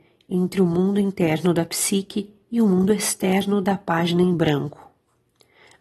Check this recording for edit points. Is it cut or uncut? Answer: uncut